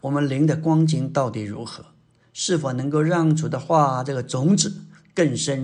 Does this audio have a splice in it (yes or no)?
no